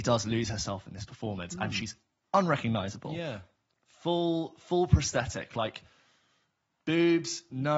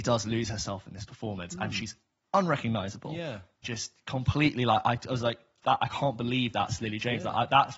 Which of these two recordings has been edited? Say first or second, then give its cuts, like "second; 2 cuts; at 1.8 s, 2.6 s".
second; 1 cut; at 3.6 s